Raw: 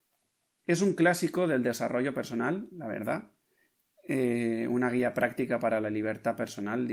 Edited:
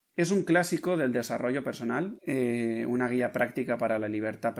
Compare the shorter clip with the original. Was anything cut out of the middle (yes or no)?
yes